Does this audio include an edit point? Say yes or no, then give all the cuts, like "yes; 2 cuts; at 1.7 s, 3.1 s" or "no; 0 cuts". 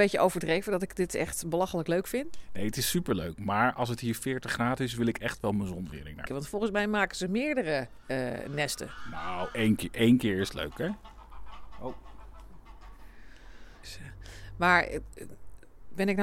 yes; 2 cuts; at 6.3 s, 13.8 s